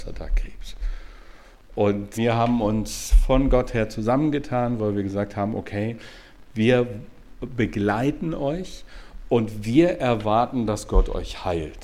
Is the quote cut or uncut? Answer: cut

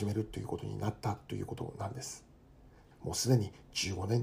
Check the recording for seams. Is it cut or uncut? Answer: cut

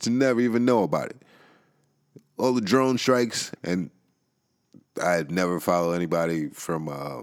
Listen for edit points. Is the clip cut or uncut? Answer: cut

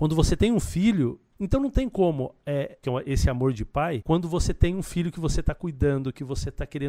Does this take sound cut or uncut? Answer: cut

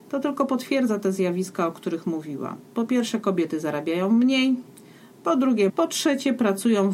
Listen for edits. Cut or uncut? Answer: cut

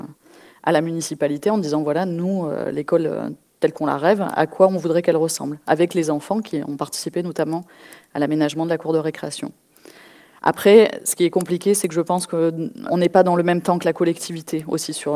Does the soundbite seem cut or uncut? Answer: cut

